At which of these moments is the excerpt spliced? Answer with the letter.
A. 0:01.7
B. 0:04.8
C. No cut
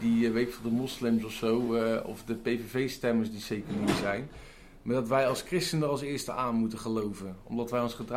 C